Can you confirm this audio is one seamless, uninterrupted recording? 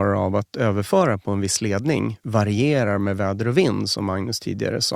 yes; 0 cuts

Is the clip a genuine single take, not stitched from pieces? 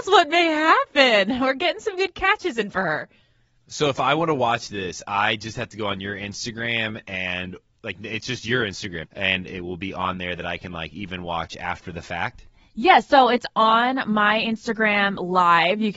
no; 1 cut; at 9.0 s

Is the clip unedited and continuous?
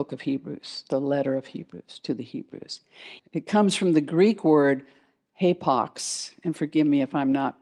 no; 1 cut; at 3.2 s

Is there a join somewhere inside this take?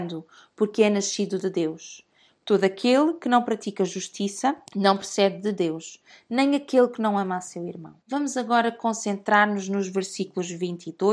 yes; 3 cuts; at 2.3 s, 4.7 s, 8.0 s

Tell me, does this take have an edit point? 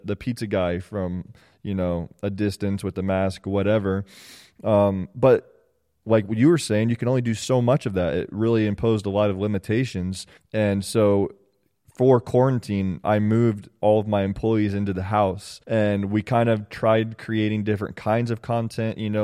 yes; 2 cuts; at 10.4 s, 15.6 s

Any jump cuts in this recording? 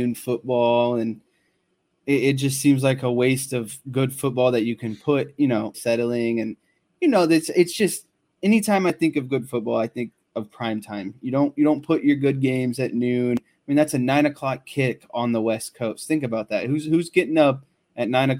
yes; 1 cut; at 5.7 s

